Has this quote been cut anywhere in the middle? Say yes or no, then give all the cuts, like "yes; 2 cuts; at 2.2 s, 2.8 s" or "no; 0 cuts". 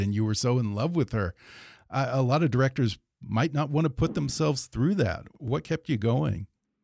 no; 0 cuts